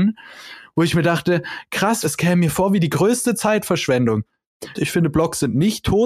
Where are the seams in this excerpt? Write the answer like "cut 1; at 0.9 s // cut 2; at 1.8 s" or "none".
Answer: cut 1; at 2.0 s // cut 2; at 4.7 s